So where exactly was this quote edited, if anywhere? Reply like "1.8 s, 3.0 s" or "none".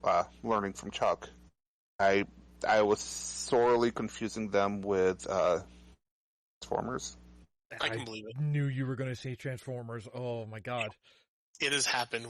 none